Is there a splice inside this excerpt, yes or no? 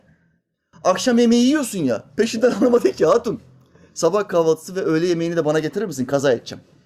no